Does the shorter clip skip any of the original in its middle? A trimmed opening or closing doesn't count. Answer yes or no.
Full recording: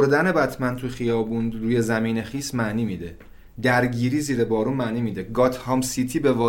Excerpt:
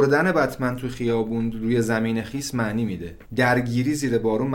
yes